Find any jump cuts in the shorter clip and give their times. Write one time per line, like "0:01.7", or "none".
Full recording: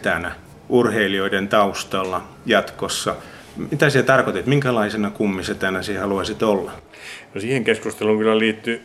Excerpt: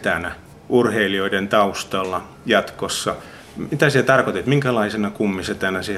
none